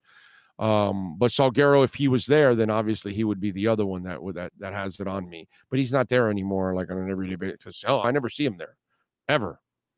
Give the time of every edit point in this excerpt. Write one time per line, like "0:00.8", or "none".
0:08.0